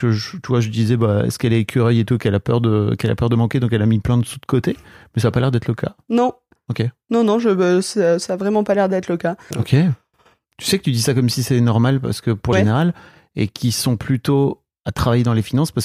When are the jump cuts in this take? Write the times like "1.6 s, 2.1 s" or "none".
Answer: 9.5 s, 12.5 s